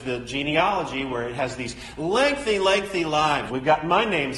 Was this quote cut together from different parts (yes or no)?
yes